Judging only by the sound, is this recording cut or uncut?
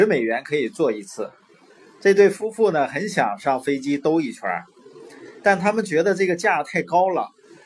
uncut